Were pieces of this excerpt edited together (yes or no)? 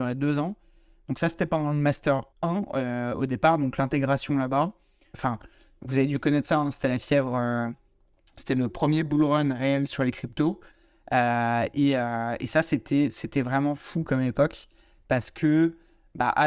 yes